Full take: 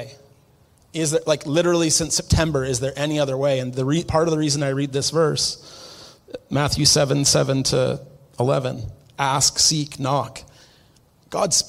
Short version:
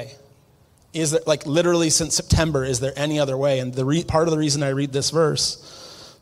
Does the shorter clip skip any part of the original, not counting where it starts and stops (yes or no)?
no